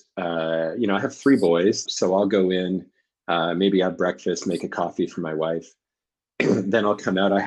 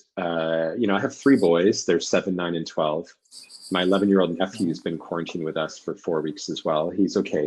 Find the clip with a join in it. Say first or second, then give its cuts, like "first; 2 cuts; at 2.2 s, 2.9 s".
first; 1 cut; at 1.9 s